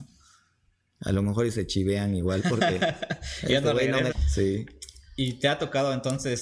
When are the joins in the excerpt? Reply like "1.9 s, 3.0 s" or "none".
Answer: 4.1 s